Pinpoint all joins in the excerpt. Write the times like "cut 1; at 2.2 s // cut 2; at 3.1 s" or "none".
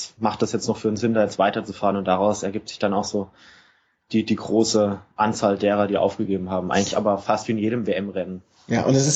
none

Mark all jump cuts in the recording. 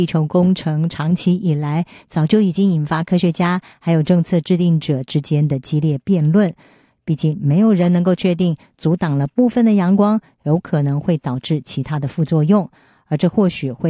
cut 1; at 6.9 s

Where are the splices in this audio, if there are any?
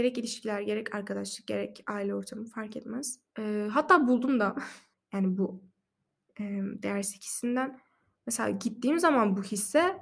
cut 1; at 3.3 s // cut 2; at 4.9 s

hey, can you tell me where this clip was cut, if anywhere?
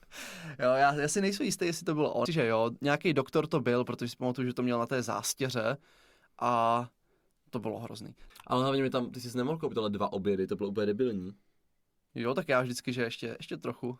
cut 1; at 2.3 s // cut 2; at 8.3 s // cut 3; at 12.1 s

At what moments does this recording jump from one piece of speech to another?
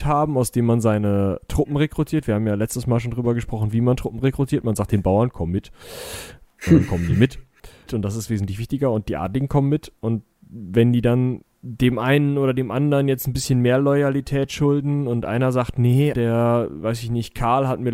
cut 1; at 7.9 s // cut 2; at 11.4 s // cut 3; at 16.1 s

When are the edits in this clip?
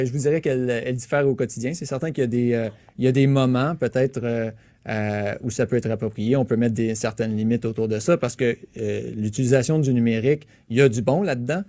none

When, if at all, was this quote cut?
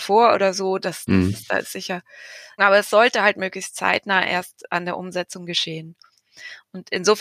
cut 1; at 2.6 s

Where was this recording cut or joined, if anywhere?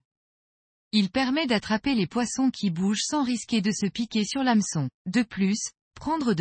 cut 1; at 5.0 s

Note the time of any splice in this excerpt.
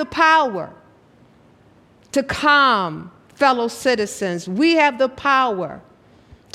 none

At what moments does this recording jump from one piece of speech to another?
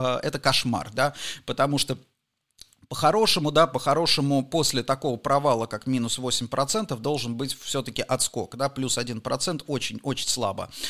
none

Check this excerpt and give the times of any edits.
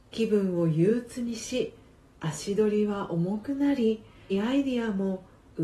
cut 1; at 4.3 s

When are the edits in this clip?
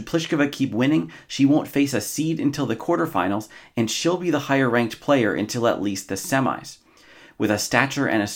none

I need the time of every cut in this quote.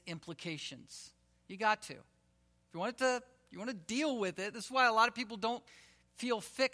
none

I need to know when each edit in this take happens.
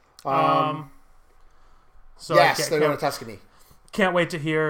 cut 1; at 2.2 s

